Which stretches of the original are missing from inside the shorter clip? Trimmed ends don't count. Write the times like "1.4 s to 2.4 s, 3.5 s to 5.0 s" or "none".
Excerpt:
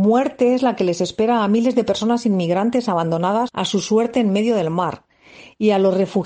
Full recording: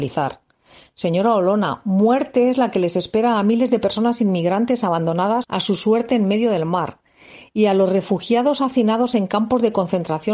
none